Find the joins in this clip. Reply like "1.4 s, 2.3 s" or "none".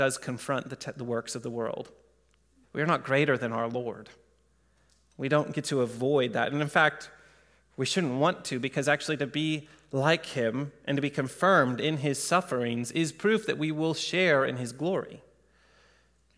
2.6 s